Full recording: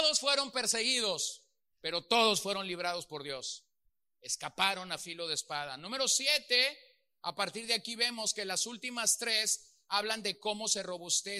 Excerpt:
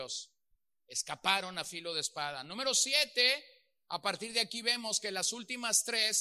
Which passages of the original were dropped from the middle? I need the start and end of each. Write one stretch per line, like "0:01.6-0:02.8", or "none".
none

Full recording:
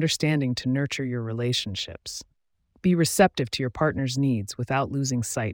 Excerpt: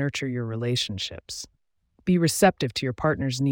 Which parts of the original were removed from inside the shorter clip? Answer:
none

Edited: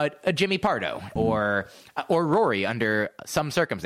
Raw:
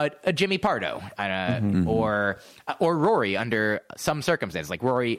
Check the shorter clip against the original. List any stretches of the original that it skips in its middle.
0:01.2-0:01.9

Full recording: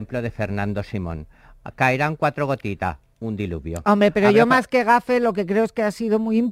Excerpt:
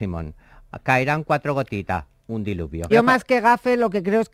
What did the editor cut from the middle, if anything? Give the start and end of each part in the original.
0:03.8-0:04.3

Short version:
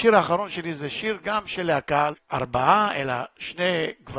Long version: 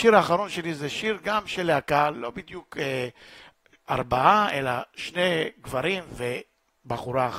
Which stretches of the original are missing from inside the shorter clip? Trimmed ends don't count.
0:02.1-0:03.7

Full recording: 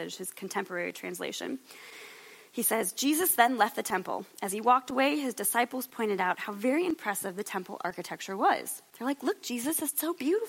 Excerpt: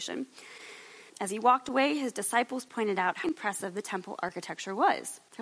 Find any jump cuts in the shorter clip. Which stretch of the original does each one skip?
0:02.4-0:04.3
0:06.5-0:06.9

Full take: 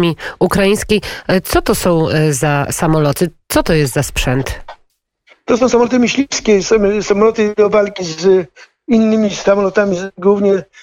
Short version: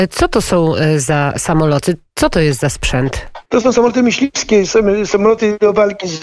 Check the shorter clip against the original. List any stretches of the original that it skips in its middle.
0:04.8-0:05.4

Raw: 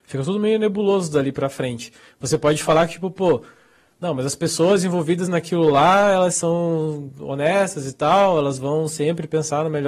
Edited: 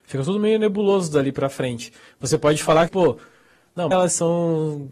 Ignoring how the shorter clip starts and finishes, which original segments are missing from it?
0:02.9-0:03.1
0:04.2-0:06.1

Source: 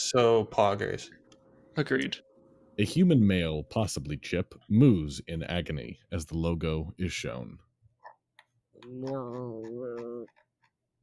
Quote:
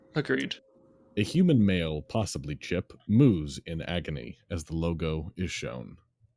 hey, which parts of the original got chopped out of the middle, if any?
none

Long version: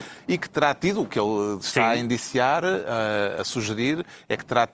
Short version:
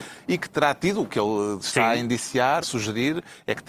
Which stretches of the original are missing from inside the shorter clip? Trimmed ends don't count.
0:02.6-0:03.4

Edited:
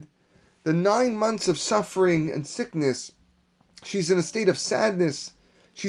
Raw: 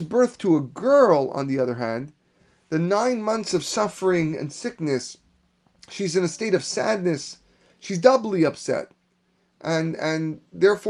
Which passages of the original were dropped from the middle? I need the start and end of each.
none

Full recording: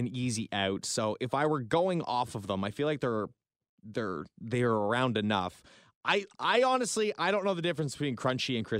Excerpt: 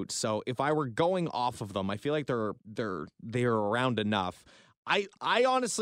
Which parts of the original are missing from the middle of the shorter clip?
0:03.3-0:03.8

